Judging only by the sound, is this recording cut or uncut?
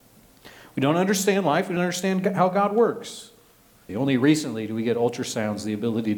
cut